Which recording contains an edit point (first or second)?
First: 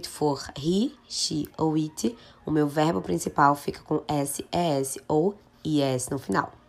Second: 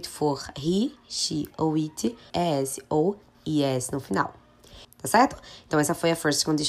second